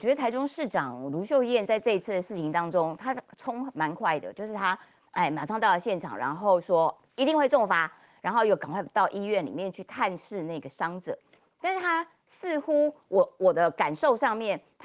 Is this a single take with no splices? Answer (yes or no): yes